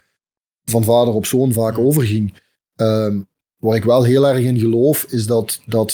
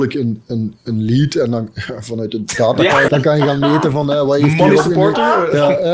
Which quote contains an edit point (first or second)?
second